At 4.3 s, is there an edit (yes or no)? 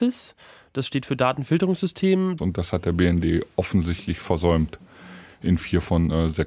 no